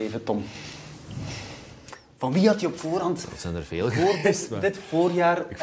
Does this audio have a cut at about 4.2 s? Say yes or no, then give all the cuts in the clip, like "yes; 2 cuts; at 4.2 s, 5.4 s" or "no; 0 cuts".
no; 0 cuts